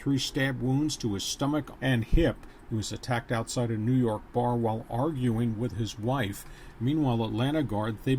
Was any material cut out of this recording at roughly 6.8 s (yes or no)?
no